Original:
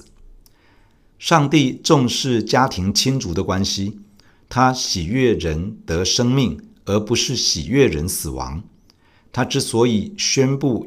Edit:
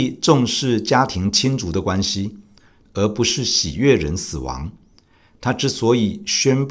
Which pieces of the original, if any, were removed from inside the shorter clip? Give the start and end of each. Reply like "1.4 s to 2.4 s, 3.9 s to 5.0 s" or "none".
4.5 s to 6.8 s